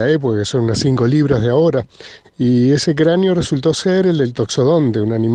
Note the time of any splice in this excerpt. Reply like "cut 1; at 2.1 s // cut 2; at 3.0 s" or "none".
cut 1; at 2.2 s